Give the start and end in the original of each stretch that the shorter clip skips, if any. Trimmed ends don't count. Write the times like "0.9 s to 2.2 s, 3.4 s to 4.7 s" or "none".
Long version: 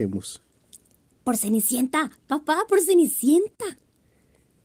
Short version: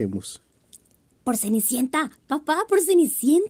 none